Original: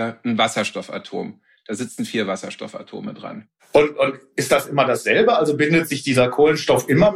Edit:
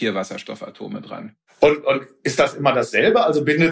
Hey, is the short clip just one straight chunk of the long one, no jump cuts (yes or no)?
yes